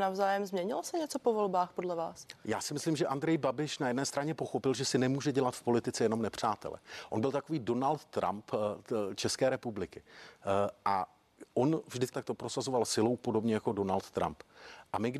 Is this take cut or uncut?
cut